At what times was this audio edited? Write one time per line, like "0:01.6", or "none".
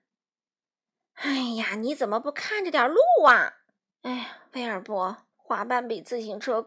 0:03.9
0:05.3